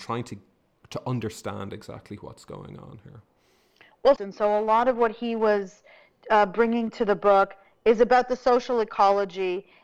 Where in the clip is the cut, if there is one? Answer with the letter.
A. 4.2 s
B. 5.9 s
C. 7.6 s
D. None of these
A